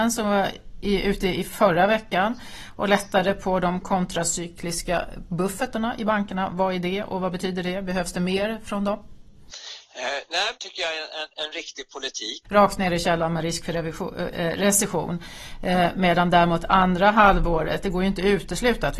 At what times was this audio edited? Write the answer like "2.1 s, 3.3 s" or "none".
10.6 s, 12.4 s